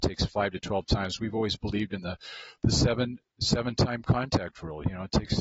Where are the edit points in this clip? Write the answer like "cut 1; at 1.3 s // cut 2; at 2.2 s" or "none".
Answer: none